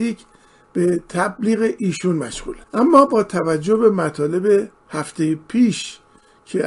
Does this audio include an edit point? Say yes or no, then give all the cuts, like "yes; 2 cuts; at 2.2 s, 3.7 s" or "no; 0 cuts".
yes; 1 cut; at 2.6 s